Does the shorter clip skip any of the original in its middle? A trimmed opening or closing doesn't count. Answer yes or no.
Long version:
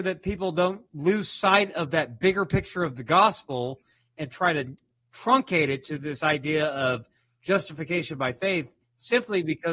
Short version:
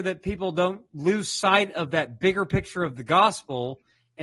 no